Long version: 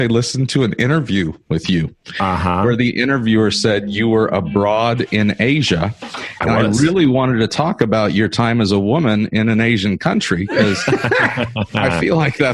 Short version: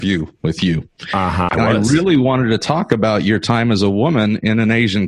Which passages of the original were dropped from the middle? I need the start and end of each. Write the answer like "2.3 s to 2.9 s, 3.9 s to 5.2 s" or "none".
2.5 s to 6.4 s